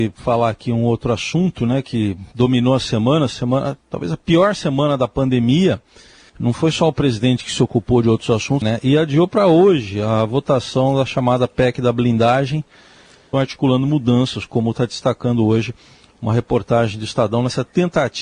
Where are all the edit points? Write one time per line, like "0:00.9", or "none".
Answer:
0:08.6
0:13.3